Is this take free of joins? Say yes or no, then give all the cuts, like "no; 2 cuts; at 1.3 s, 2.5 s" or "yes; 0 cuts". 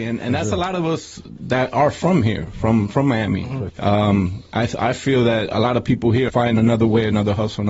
no; 2 cuts; at 3.7 s, 6.3 s